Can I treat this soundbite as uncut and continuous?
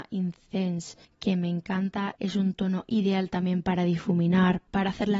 yes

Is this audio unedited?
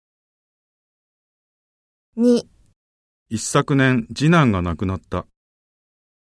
no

